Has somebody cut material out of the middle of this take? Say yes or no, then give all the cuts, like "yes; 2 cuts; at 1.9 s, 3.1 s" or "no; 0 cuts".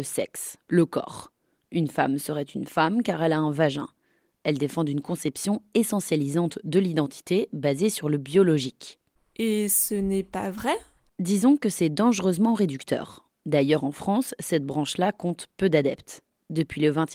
no; 0 cuts